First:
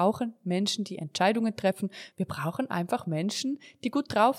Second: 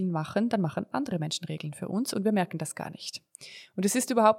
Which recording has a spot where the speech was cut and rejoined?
first; 1 cut; at 2.1 s

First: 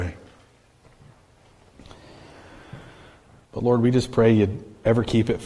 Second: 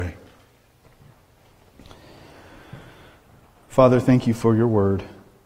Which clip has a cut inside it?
first; 1 cut; at 3.4 s

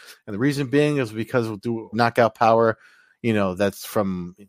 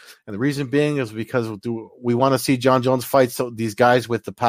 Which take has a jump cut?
first; 1 cut; at 1.9 s

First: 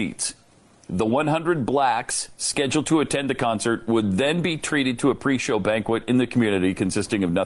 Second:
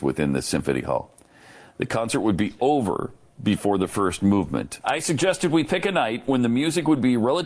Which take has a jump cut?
second; 1 cut; at 4.8 s

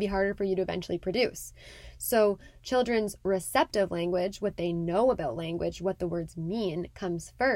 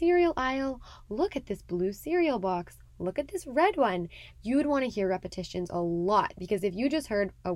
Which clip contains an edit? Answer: second; 1 cut; at 4.3 s

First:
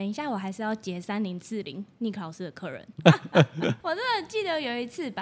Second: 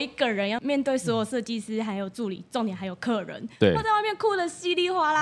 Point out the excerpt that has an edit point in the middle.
first; 1 cut; at 3.0 s

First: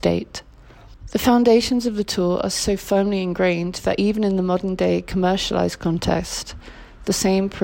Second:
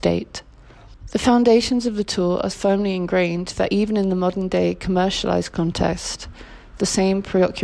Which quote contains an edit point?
second; 1 cut; at 2.5 s

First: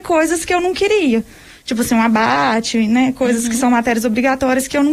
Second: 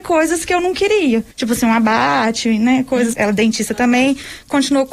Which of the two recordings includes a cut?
second; 2 cuts; at 1.3 s, 3.1 s

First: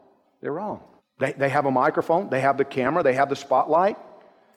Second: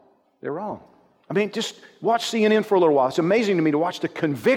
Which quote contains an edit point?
first; 1 cut; at 1.0 s

